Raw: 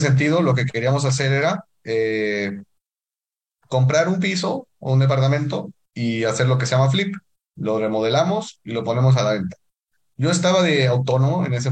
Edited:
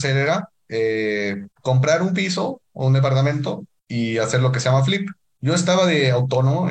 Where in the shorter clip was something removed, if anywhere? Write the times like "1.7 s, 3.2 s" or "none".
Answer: 1.5 s, 5.2 s